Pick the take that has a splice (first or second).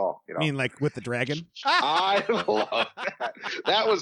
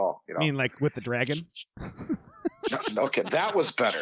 first